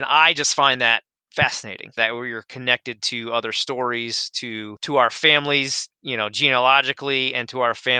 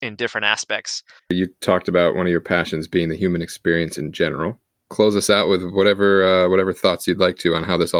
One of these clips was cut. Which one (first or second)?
second